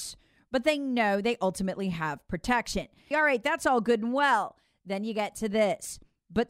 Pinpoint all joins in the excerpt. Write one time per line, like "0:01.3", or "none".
0:03.1